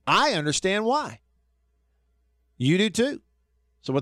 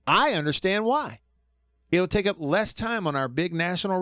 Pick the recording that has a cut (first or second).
second